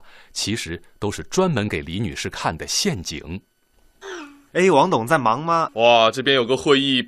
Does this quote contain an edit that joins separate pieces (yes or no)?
yes